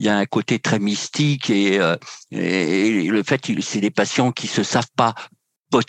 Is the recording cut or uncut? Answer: uncut